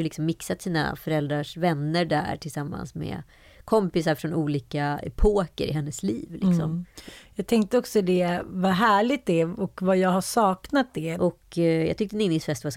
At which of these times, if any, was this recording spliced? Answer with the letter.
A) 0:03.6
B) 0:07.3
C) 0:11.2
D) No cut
C